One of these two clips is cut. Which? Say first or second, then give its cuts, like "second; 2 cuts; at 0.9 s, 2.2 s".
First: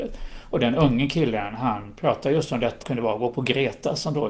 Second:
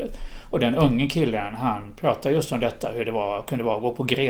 first; 1 cut; at 2.8 s